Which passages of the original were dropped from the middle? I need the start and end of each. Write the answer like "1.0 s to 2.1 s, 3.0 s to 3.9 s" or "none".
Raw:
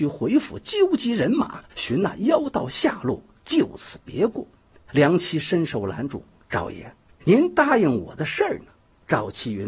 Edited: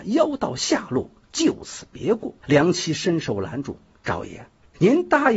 4.5 s to 4.8 s